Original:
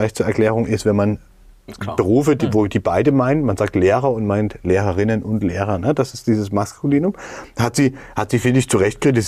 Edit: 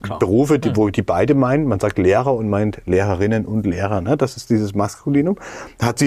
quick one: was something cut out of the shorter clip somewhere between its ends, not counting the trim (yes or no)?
no